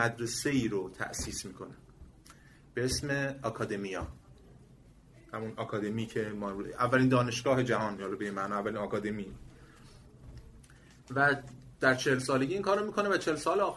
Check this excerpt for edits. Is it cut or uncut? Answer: uncut